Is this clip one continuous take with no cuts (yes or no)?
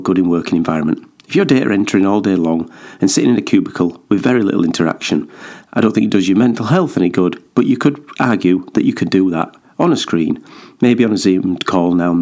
yes